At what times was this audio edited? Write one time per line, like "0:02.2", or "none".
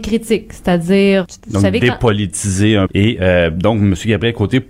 0:01.2
0:02.9